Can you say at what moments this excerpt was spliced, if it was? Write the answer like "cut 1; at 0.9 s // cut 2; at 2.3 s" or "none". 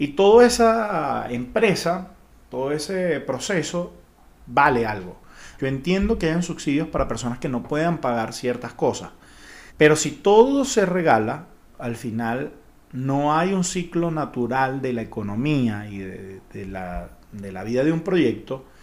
cut 1; at 5.6 s // cut 2; at 9.7 s